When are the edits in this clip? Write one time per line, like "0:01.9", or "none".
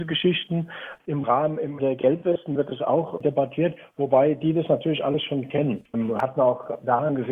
0:01.8
0:05.9